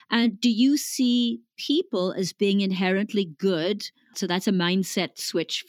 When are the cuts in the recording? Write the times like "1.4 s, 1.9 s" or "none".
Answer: 4.1 s